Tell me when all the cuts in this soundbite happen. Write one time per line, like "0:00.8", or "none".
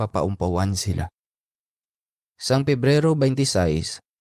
0:02.2

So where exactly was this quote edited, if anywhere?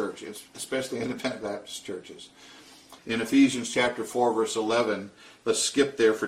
0:03.0

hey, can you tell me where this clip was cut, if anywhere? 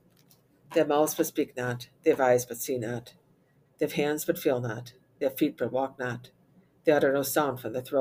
0:03.7

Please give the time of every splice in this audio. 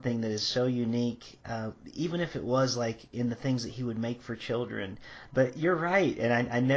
0:05.3

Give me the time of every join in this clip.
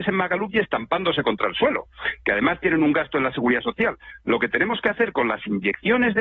none

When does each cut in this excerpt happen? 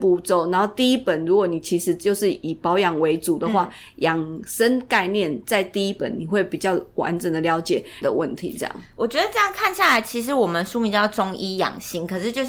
0:08.0

